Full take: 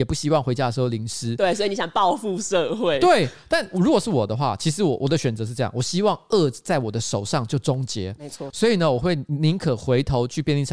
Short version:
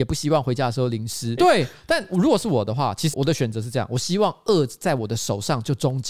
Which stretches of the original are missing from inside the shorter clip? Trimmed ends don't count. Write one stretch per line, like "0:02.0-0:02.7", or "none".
0:01.4-0:03.0
0:04.8-0:05.0